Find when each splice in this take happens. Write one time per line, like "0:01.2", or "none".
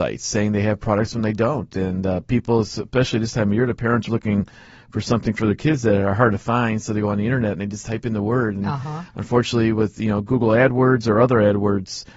0:04.1